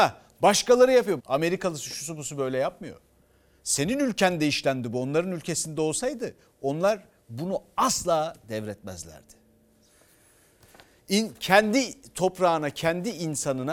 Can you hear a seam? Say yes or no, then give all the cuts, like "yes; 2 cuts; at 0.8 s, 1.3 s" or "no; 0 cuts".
yes; 1 cut; at 1.2 s